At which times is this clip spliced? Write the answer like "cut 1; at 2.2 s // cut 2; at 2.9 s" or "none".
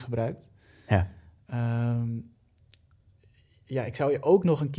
none